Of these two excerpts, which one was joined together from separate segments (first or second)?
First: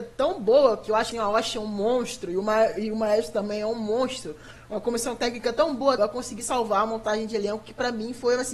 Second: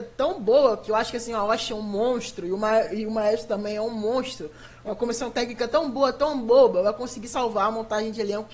first